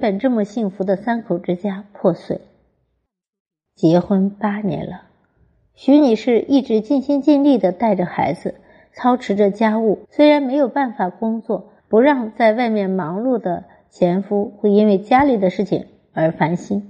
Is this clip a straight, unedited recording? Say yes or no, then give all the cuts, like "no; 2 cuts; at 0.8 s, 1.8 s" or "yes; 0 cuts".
no; 2 cuts; at 10.0 s, 11.8 s